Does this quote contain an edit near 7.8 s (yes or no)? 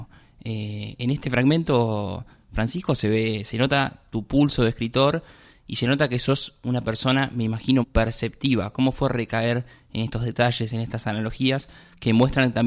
yes